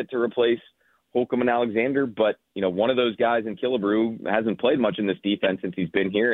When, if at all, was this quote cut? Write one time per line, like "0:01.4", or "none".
none